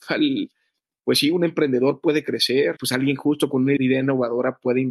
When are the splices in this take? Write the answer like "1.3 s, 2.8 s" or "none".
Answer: 2.8 s, 3.8 s